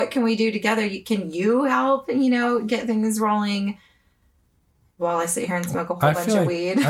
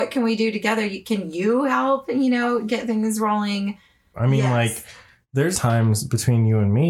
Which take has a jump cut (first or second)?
second